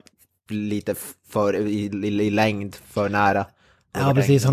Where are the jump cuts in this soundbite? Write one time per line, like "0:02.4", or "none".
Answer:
none